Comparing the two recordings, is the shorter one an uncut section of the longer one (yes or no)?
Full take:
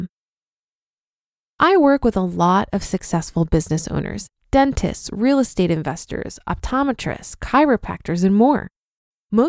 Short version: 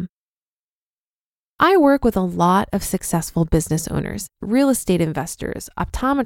no